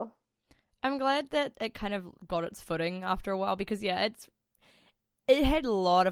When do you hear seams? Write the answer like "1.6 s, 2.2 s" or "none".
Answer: none